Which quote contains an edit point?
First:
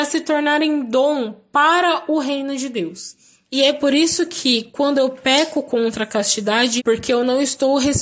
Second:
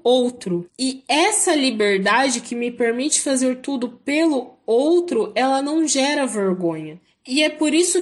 first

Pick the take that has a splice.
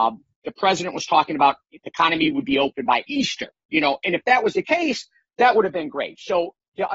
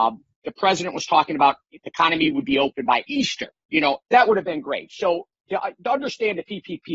second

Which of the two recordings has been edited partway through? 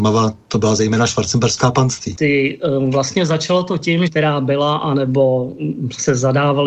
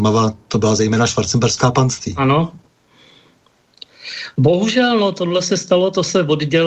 first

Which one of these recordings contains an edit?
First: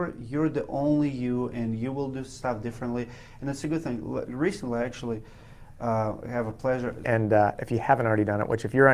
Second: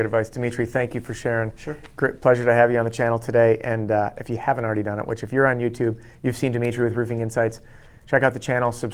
first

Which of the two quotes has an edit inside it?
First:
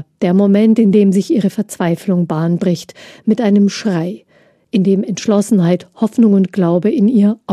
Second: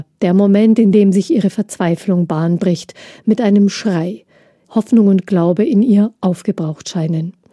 second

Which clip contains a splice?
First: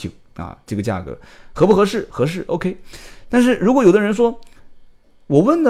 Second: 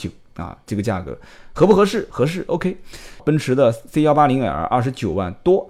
second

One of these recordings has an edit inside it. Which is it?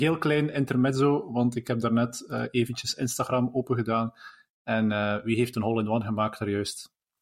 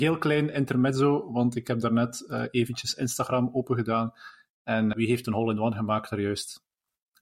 second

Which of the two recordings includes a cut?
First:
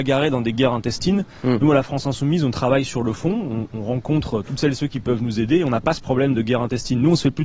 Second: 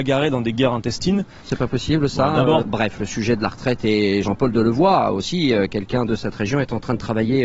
second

